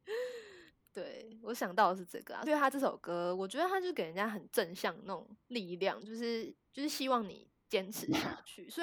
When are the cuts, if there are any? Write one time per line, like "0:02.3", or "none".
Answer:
0:02.5
0:05.4